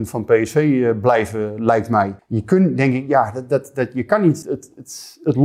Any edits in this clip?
yes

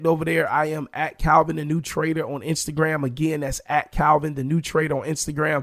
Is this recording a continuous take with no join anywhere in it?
yes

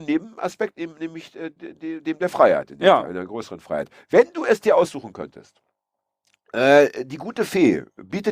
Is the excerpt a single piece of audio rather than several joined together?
yes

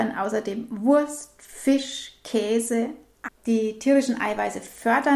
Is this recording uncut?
no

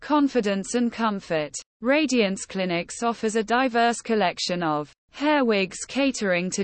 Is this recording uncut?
no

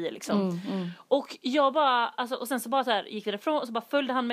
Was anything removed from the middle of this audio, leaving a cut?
no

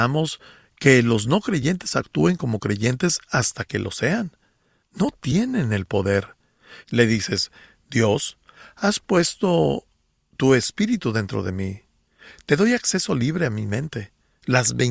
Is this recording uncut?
no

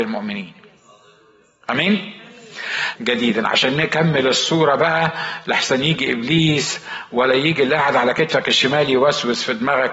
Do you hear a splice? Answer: yes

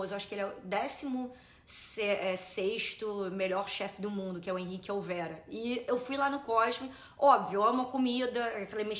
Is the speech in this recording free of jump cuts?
yes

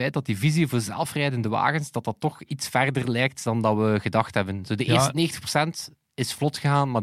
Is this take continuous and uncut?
yes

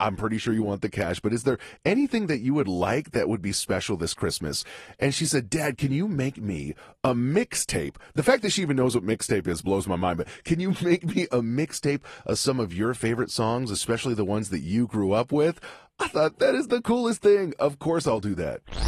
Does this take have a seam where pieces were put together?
no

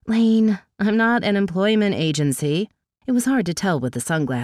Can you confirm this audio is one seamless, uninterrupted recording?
no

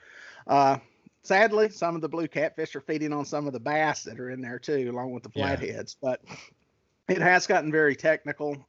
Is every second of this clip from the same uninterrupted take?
yes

